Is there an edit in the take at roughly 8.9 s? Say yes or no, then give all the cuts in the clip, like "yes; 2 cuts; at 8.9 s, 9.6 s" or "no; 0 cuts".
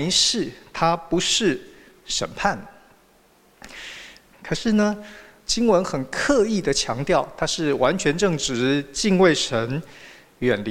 no; 1 cut; at 4.3 s